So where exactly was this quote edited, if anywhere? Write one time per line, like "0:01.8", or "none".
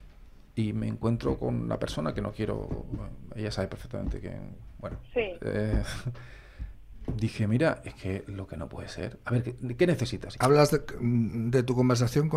0:09.2
0:10.3